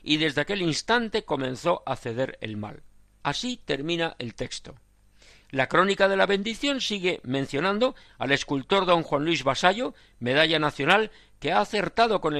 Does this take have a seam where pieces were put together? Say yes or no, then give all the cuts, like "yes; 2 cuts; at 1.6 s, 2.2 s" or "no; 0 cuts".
yes; 1 cut; at 3.2 s